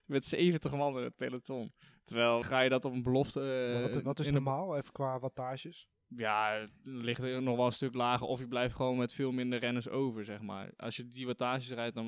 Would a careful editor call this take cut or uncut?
cut